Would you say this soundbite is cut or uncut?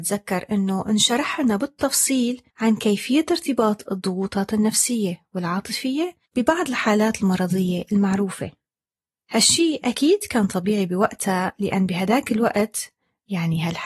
cut